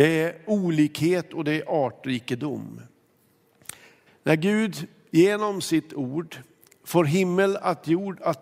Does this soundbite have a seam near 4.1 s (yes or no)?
yes